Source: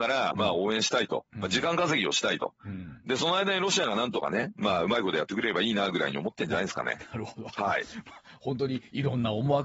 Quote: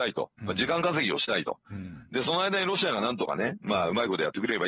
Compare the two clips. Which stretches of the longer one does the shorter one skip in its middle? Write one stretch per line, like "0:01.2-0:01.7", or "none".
none